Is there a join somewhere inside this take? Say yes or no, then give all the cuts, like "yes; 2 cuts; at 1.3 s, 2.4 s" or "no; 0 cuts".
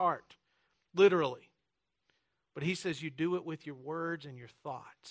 no; 0 cuts